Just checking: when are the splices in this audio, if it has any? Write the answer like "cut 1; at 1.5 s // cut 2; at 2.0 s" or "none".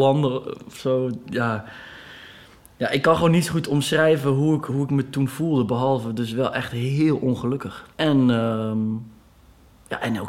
cut 1; at 7.9 s